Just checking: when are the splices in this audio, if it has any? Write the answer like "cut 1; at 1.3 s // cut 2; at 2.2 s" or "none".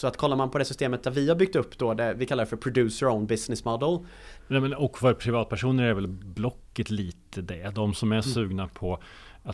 cut 1; at 4.4 s